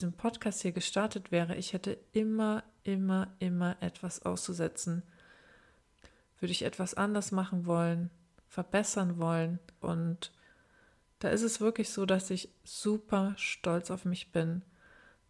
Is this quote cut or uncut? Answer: cut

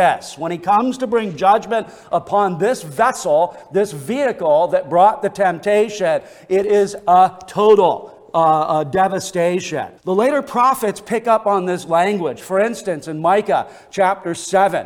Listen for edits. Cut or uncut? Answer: cut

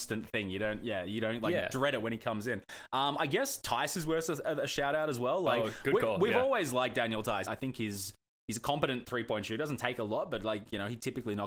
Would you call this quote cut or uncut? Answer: cut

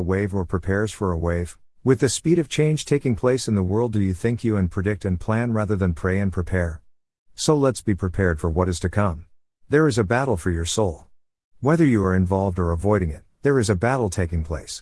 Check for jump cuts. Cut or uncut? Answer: cut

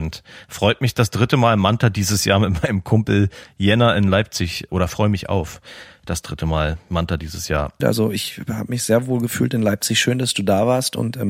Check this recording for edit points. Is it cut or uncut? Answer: cut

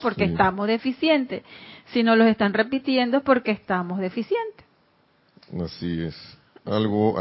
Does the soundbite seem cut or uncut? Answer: uncut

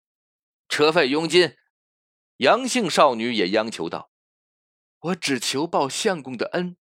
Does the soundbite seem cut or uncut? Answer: cut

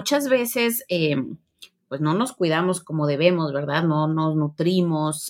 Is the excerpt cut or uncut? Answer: uncut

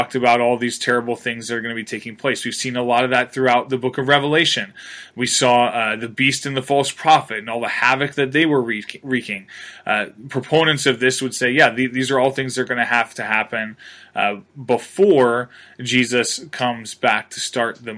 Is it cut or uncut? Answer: uncut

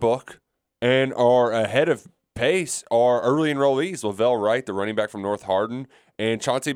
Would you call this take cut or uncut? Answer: uncut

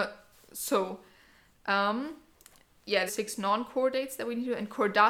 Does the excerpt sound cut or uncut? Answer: cut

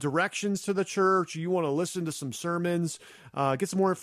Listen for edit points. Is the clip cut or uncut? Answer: uncut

